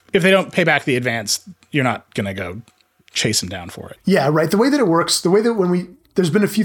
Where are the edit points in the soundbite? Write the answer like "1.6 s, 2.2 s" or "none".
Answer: 4.0 s